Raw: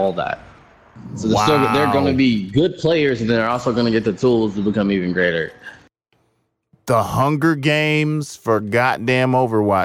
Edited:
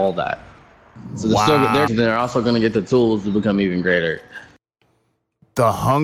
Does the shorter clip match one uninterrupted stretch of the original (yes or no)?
no